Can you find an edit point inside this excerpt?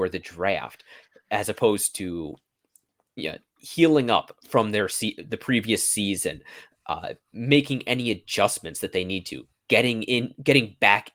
no; 0 cuts

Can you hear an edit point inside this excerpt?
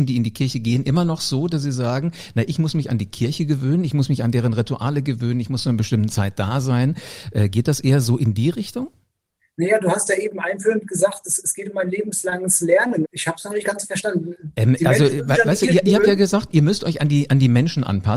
yes; 1 cut; at 13.1 s

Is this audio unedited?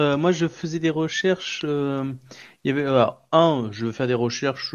yes; 0 cuts

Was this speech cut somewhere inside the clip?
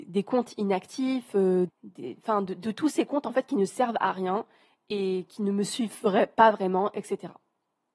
yes; 1 cut; at 1.7 s

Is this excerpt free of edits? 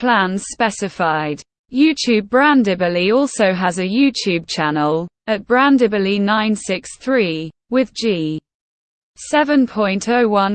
yes; 0 cuts

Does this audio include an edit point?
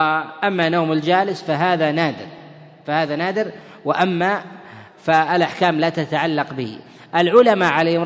no; 0 cuts

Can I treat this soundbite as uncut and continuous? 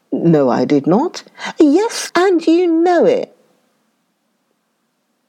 no; 1 cut; at 2.1 s

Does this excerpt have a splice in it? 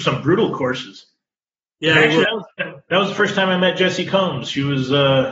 no; 0 cuts

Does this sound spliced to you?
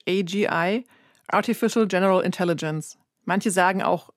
no; 0 cuts

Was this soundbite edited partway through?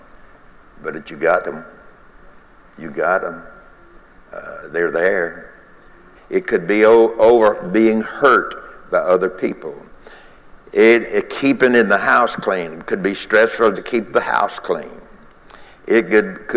yes; 2 cuts; at 6.1 s, 13.7 s

